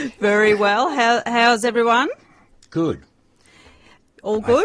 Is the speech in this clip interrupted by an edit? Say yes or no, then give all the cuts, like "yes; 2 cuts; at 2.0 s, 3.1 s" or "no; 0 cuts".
no; 0 cuts